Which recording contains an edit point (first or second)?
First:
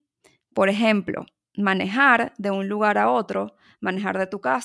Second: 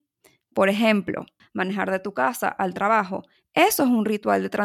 second